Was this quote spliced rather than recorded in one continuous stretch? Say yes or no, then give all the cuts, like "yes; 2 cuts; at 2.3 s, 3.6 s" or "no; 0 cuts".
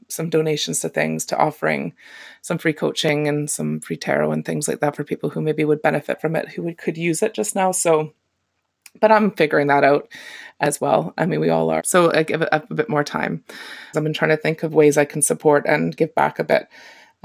yes; 2 cuts; at 11.8 s, 13.9 s